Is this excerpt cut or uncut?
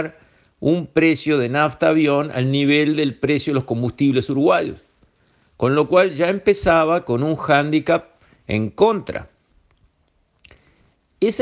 uncut